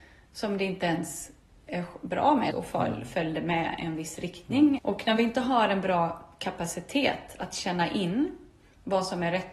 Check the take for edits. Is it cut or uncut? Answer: cut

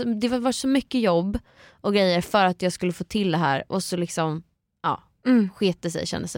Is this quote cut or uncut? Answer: uncut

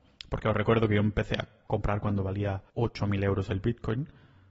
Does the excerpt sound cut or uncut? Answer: cut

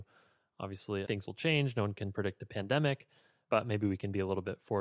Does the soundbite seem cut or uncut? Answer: cut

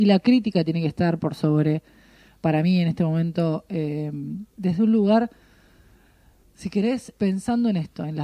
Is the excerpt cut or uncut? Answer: cut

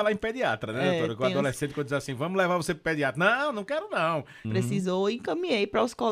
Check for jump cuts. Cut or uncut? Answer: cut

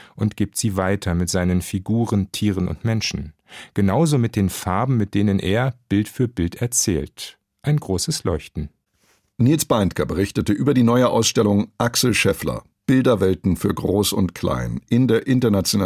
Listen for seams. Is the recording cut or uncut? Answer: uncut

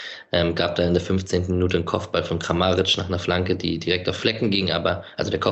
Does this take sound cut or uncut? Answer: uncut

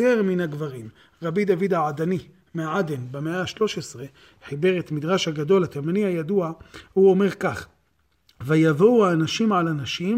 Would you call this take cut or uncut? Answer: uncut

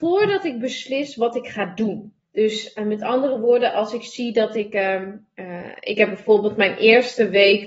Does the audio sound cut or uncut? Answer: cut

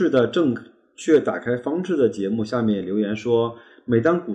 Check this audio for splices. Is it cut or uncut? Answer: uncut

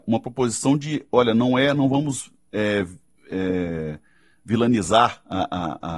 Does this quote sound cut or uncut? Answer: uncut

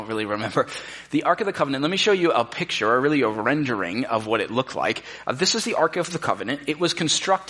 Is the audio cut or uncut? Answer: uncut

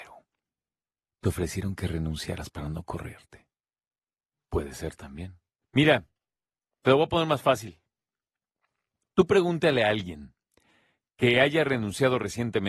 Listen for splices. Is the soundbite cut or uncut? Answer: cut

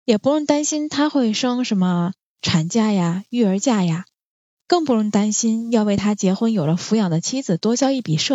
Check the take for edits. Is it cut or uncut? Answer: uncut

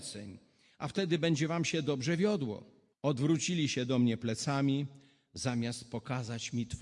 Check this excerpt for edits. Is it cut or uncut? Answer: cut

